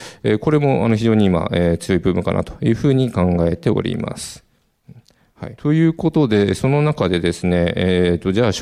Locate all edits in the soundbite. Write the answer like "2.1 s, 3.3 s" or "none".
5.6 s